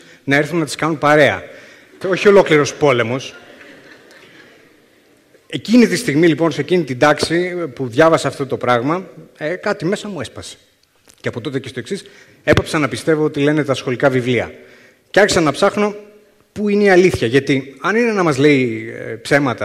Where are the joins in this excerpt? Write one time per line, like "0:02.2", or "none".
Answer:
0:02.0

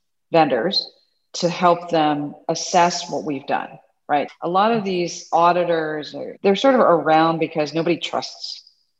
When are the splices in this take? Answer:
0:04.3
0:06.4

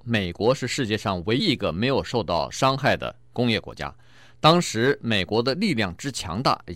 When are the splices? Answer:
0:01.4

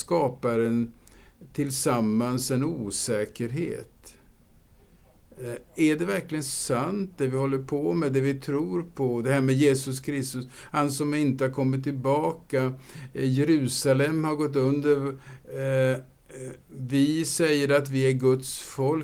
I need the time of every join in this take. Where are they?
none

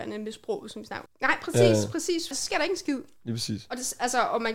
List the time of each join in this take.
0:01.1
0:02.3

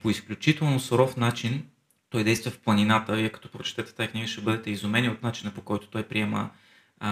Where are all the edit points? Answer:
none

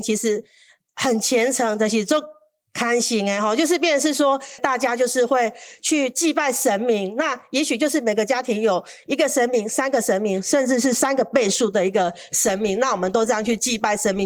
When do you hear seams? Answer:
0:04.6

